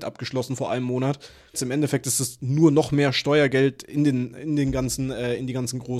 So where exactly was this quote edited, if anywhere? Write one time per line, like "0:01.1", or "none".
0:01.5